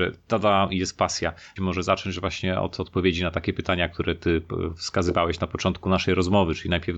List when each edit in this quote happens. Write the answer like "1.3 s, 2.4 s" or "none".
1.6 s